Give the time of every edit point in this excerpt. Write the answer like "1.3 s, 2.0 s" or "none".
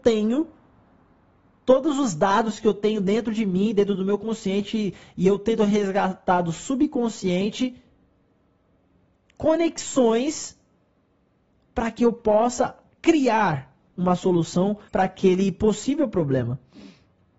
14.9 s